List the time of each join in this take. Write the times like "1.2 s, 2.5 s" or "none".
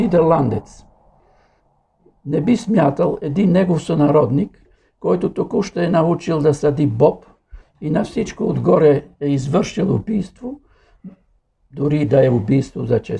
7.6 s